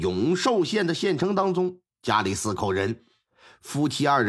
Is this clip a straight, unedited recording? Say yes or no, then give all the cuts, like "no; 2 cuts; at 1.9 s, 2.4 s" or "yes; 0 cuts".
no; 1 cut; at 1.9 s